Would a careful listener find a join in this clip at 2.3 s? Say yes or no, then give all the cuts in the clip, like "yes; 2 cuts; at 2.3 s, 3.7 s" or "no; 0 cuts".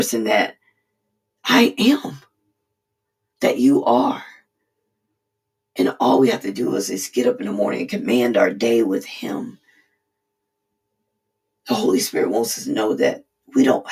no; 0 cuts